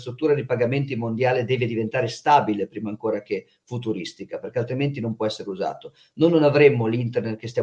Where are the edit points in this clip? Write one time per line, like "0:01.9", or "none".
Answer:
none